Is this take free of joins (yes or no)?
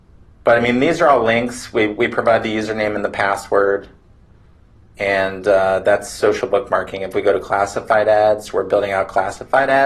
yes